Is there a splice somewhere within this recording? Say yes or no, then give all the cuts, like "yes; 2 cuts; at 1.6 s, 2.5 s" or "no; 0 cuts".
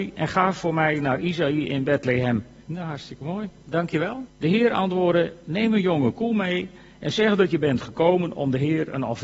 yes; 2 cuts; at 2.6 s, 4.3 s